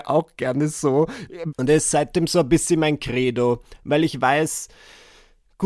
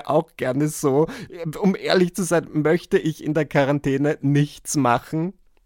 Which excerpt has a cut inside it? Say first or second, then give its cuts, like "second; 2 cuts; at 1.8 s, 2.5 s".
first; 1 cut; at 1.5 s